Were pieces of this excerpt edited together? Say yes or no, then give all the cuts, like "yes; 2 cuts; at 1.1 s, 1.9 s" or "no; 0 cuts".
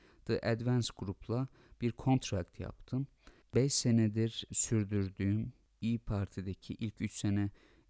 yes; 1 cut; at 3.4 s